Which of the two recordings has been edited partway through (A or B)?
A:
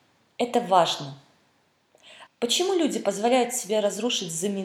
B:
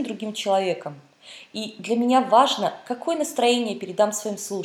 A